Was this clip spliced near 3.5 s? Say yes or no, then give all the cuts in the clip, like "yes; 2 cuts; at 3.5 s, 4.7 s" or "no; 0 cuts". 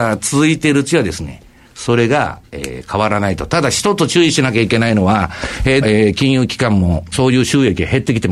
no; 2 cuts; at 5.8 s, 7.1 s